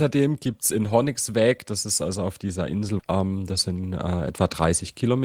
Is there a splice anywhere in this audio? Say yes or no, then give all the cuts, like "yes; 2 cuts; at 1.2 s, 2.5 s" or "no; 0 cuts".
yes; 1 cut; at 3.0 s